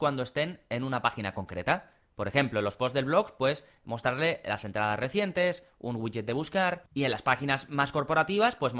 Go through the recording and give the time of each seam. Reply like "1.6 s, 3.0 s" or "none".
none